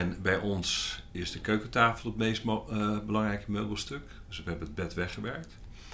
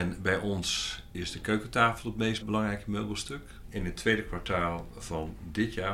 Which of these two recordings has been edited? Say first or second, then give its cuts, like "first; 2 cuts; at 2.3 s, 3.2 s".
second; 2 cuts; at 2.4 s, 3.6 s